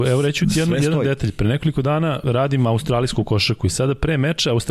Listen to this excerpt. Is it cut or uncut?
cut